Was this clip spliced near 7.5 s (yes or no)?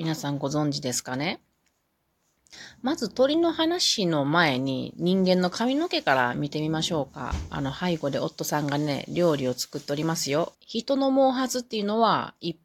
no